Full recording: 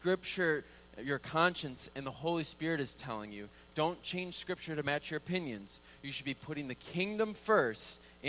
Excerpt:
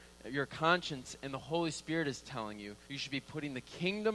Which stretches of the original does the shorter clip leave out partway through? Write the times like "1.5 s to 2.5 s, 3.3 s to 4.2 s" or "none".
3.6 s to 6.0 s